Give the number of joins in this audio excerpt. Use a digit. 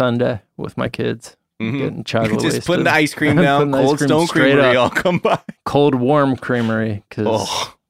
1